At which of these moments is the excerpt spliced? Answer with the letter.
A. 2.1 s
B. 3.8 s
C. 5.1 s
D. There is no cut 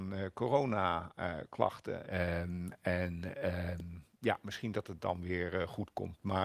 A